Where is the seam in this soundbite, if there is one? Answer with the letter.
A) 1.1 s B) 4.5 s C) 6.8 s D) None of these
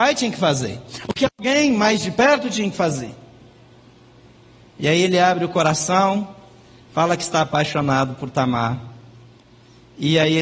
D